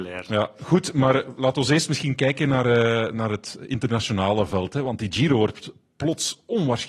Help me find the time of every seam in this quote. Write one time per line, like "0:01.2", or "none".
none